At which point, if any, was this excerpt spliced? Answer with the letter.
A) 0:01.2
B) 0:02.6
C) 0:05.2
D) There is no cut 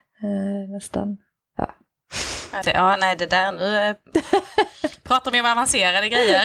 B